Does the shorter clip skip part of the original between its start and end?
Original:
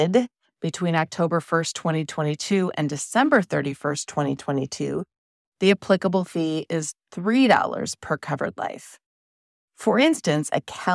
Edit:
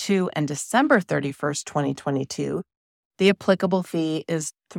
no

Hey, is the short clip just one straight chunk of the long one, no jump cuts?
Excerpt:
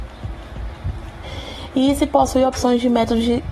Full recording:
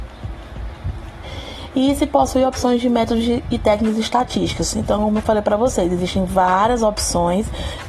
yes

